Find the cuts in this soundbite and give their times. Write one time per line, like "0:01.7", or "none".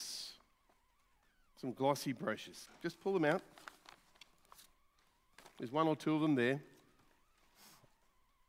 none